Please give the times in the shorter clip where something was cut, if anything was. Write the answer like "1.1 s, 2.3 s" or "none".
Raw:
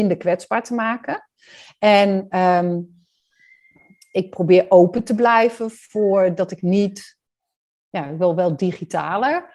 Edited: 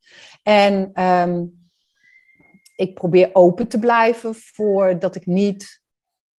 none